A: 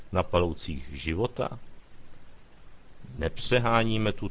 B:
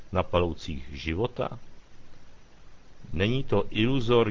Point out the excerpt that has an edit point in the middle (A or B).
B